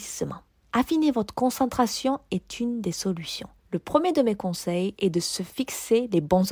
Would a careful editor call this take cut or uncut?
cut